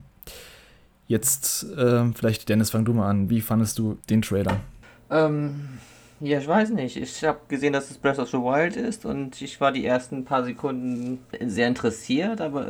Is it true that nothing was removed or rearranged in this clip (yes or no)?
yes